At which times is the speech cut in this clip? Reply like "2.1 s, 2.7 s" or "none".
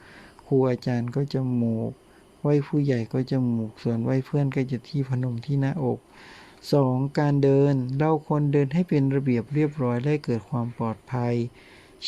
none